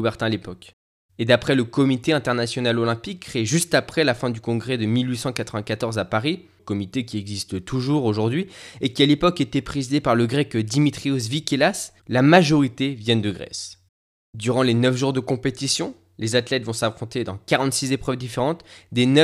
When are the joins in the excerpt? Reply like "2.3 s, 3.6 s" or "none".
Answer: 12.0 s